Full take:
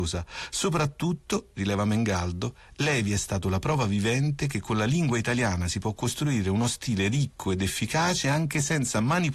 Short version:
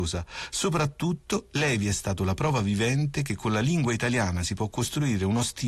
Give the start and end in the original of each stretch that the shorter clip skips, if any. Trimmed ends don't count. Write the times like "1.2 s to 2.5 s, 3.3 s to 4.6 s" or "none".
1.5 s to 2.8 s